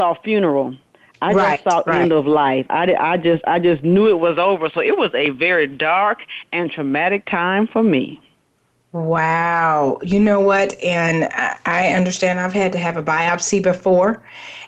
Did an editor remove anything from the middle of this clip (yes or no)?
no